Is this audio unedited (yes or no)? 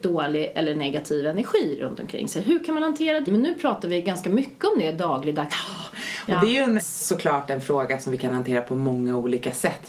no